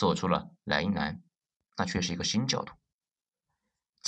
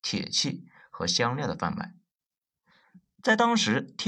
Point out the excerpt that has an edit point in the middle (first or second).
first